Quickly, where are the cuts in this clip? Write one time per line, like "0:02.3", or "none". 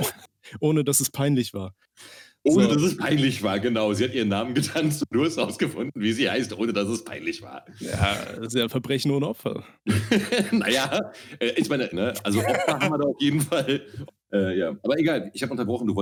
0:11.9
0:14.1